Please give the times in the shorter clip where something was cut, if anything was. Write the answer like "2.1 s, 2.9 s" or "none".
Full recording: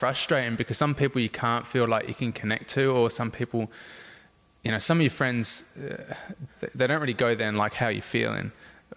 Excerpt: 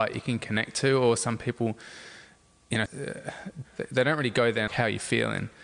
2.9 s, 4.7 s